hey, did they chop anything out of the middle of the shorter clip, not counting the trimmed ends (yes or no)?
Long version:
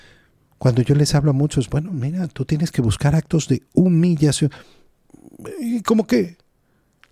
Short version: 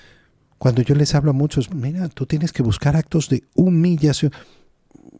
yes